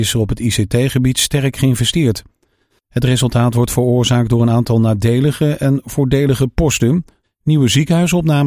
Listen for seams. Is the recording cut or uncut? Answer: cut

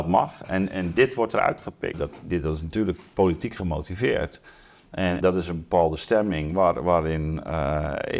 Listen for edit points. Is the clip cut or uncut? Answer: cut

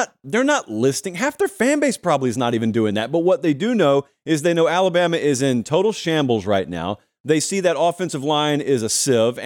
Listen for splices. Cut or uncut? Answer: uncut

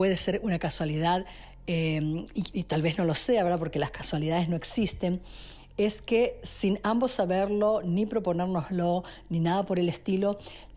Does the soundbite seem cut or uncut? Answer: uncut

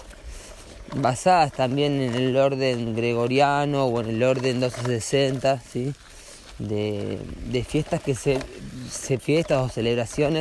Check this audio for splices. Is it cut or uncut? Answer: cut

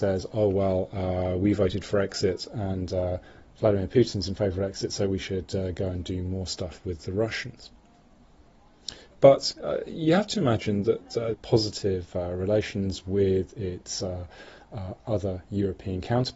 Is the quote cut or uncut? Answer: cut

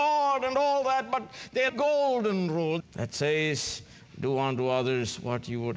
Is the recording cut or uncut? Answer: cut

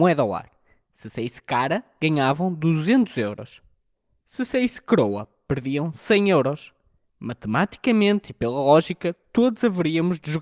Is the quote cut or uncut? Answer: uncut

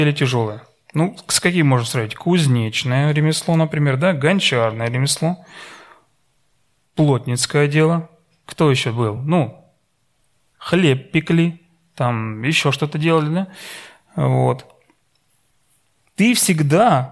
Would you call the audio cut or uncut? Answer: uncut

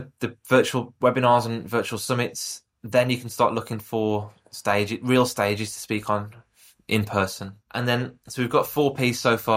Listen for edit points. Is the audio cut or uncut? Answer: cut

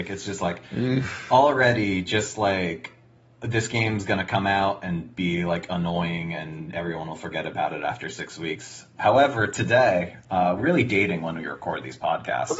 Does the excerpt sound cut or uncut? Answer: cut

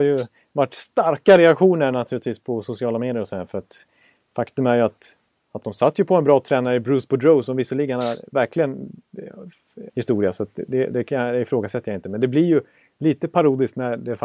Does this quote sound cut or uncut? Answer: cut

